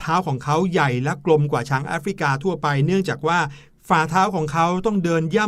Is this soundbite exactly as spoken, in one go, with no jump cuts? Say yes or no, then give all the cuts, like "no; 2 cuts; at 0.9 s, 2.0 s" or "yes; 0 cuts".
yes; 0 cuts